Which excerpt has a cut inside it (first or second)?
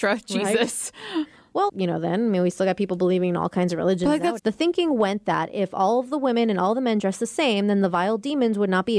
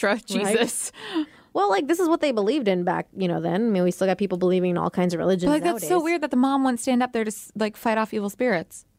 first